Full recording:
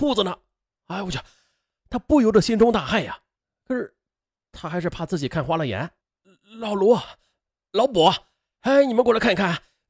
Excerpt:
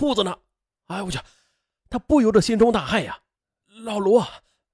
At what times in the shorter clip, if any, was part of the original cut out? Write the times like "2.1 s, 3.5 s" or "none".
3.6 s